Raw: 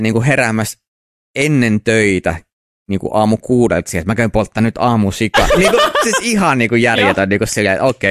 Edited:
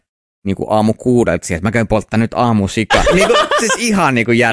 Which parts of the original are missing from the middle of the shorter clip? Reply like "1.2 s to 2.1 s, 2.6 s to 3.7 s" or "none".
none

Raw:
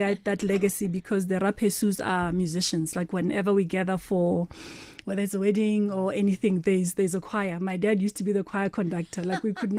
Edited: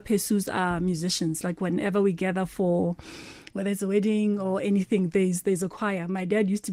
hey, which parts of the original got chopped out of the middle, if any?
none

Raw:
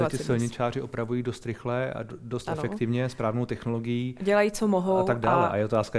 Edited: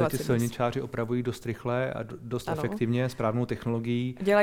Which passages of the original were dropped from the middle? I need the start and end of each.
none

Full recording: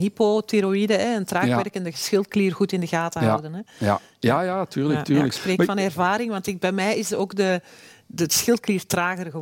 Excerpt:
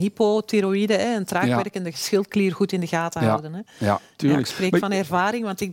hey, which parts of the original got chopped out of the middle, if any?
4.2 s to 5.1 s

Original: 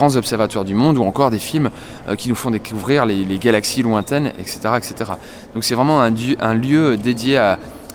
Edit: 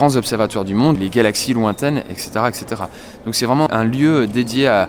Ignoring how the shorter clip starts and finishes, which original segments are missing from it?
1.0 s to 3.2 s, 6.0 s to 6.4 s

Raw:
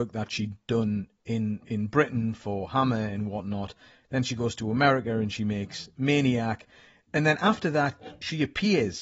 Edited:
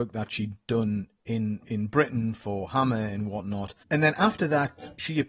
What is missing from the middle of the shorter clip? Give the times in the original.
3.8 s to 7.1 s

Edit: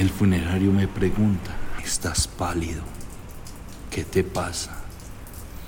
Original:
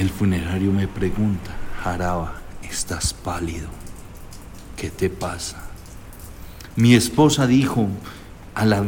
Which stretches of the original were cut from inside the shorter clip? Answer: 1.8 s to 2.6 s

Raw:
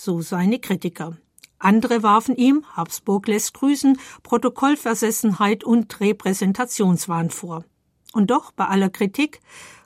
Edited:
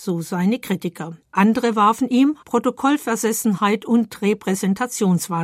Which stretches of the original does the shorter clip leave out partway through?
1.2 s to 1.5 s, 2.7 s to 4.2 s

